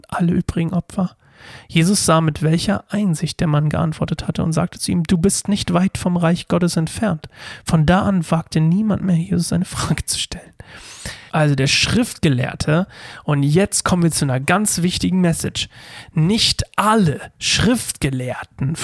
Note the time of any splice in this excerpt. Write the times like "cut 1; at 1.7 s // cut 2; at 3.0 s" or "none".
cut 1; at 11.3 s